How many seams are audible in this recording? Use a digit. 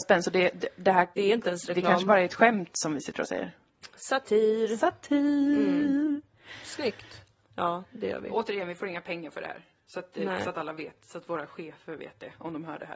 2